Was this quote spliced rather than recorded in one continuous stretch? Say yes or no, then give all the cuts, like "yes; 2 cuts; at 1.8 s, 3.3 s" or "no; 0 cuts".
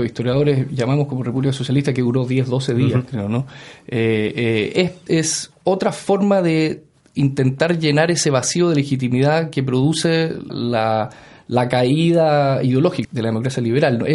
yes; 3 cuts; at 5.1 s, 10.5 s, 13.0 s